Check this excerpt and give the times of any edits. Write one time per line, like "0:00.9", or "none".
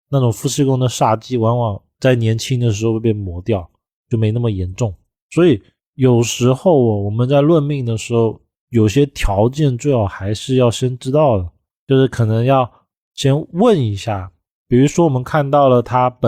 none